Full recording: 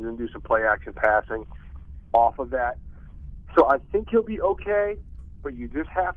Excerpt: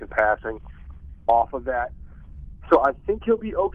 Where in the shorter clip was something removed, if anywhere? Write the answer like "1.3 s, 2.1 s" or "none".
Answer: none